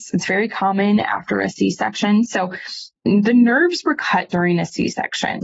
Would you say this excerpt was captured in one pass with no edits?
no; 1 cut; at 3.0 s

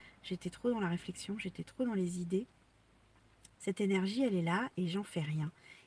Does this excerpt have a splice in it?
yes; 2 cuts; at 3.6 s, 4.7 s

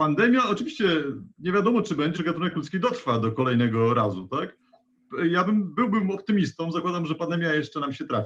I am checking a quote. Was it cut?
yes; 1 cut; at 2.1 s

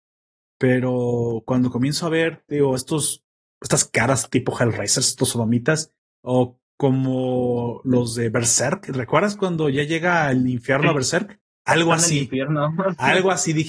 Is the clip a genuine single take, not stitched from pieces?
yes; 0 cuts

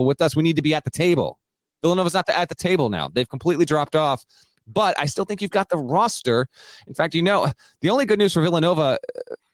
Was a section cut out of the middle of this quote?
no; 0 cuts

